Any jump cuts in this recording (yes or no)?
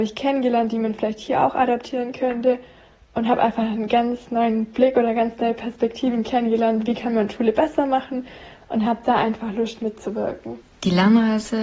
yes